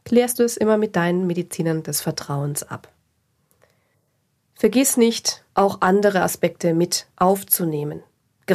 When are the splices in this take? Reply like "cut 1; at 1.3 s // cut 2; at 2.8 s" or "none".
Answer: none